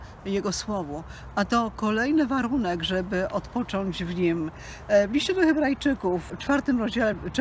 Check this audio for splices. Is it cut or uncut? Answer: uncut